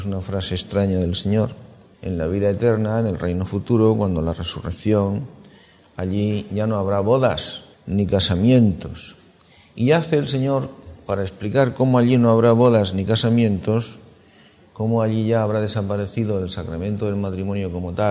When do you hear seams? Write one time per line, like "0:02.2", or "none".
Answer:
0:01.9
0:07.7

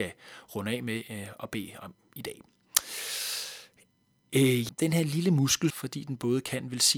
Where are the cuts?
0:04.7
0:05.7

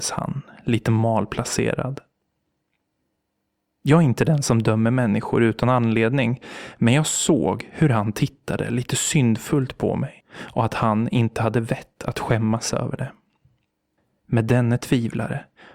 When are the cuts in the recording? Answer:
none

